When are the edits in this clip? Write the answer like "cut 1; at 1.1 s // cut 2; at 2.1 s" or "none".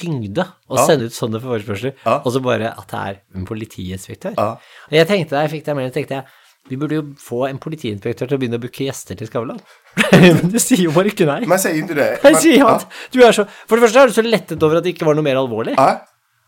none

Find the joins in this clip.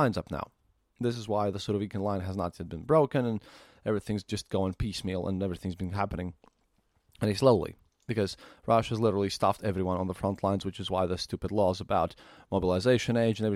none

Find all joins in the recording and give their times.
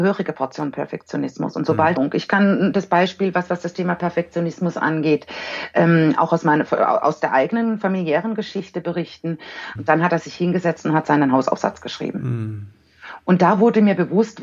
cut 1; at 2.0 s // cut 2; at 9.8 s

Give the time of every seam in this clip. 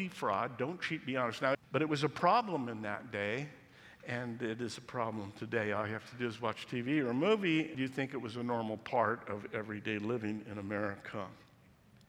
cut 1; at 1.5 s // cut 2; at 7.7 s

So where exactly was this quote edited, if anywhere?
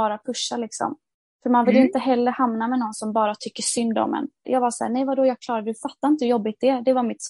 cut 1; at 4.4 s

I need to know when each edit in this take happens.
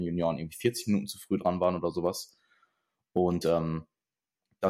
none

